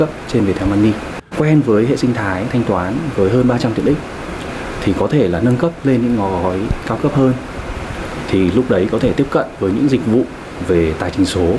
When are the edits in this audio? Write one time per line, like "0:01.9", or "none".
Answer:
0:01.3